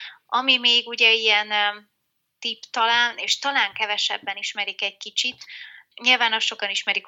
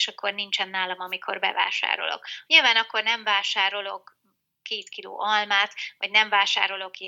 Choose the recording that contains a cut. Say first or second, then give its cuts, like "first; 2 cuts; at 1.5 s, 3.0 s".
second; 1 cut; at 2.5 s